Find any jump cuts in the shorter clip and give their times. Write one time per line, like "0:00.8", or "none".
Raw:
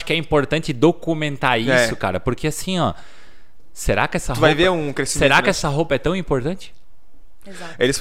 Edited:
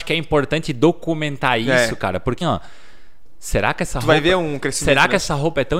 0:02.4